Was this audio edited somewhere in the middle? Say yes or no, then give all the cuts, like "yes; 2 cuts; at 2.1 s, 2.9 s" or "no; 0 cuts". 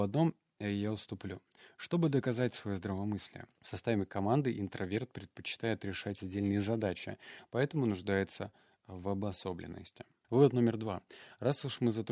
yes; 2 cuts; at 3.5 s, 10.2 s